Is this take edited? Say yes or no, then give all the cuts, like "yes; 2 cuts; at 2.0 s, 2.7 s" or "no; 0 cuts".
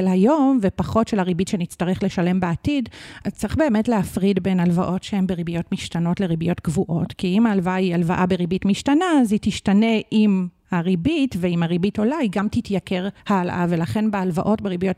yes; 1 cut; at 13.2 s